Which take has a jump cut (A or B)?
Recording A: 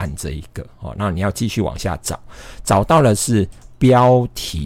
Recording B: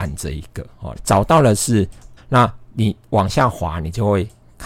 B